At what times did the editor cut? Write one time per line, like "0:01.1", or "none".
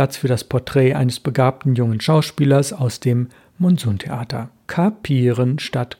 0:04.6